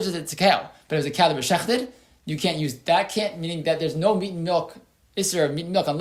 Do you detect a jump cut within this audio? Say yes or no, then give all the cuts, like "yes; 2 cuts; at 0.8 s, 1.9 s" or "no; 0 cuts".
no; 0 cuts